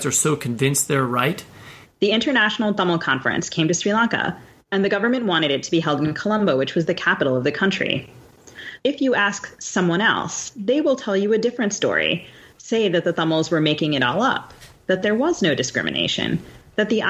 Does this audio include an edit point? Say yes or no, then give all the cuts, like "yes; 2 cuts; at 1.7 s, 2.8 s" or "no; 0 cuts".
yes; 2 cuts; at 1.9 s, 8.8 s